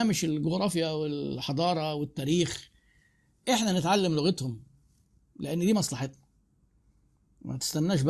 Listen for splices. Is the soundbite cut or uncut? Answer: uncut